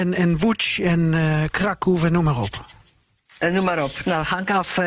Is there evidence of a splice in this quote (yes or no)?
no